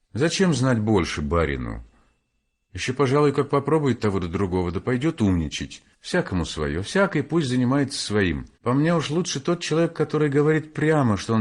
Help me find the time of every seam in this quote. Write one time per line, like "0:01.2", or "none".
0:05.9
0:08.5